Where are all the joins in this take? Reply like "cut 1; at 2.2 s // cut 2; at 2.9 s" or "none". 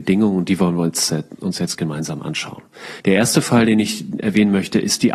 cut 1; at 3.0 s